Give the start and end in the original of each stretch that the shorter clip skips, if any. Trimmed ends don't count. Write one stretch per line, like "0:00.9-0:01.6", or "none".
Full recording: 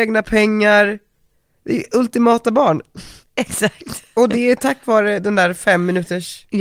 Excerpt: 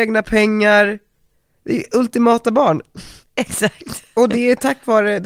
none

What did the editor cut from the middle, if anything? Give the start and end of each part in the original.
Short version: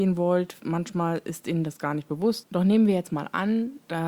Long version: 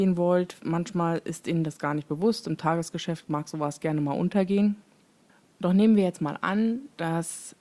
0:02.4-0:05.5

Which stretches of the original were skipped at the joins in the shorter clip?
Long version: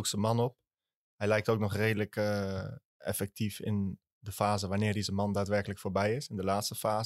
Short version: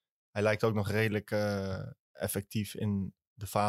none

